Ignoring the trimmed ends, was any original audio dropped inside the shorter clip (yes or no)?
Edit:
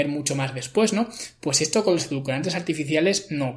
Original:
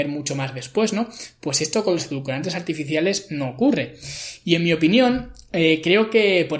no